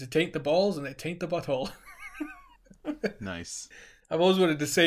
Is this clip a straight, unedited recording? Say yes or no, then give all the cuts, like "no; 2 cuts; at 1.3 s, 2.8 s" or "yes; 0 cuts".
yes; 0 cuts